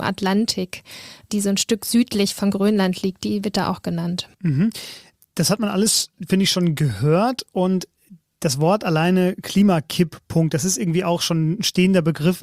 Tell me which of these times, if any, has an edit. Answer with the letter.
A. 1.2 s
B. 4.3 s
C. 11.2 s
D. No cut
D